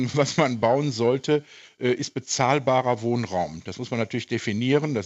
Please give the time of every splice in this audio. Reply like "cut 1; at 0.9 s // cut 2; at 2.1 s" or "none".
none